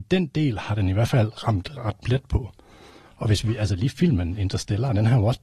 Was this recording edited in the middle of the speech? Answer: no; 0 cuts

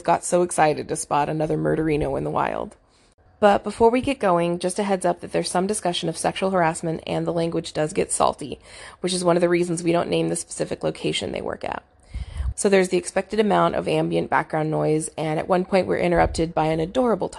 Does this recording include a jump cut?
yes; 2 cuts; at 3.3 s, 12.5 s

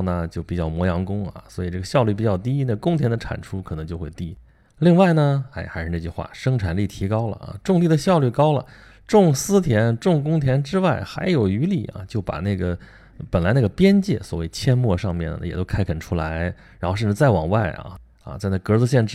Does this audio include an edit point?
no; 0 cuts

